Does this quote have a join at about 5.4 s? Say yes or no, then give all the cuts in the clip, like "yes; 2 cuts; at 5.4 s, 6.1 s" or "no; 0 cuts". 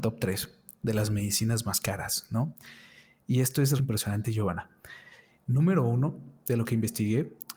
no; 1 cut; at 3.8 s